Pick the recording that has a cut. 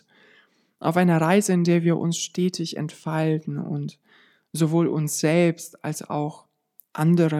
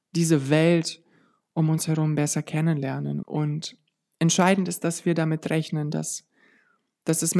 second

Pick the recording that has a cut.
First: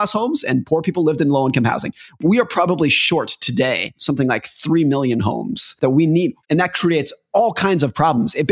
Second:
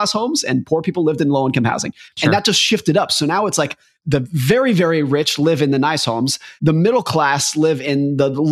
first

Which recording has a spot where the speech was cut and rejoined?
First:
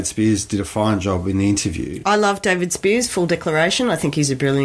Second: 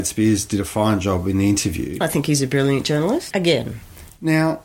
second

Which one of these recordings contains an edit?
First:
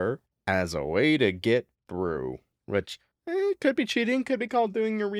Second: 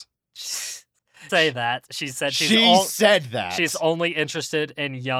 second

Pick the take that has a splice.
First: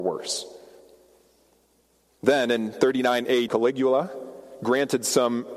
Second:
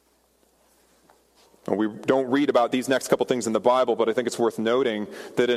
first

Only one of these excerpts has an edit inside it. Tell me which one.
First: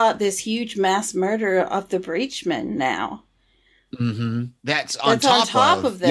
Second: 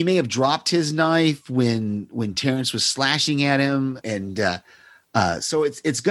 second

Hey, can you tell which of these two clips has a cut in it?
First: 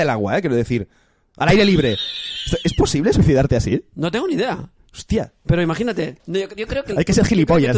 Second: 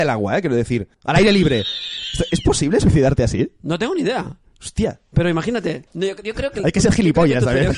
second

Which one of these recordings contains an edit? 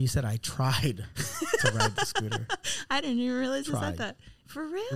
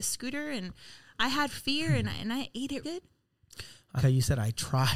second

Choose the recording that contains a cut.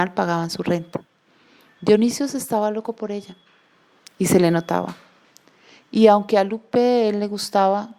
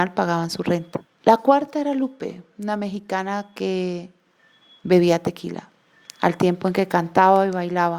second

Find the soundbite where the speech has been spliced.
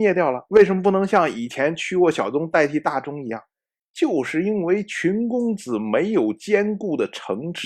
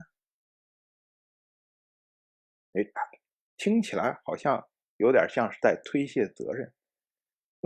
second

